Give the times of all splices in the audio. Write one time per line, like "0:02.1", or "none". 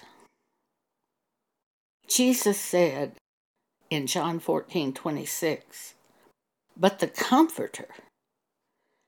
none